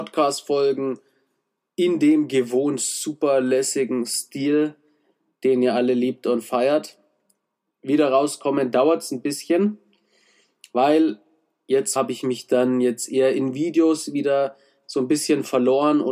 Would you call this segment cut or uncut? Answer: cut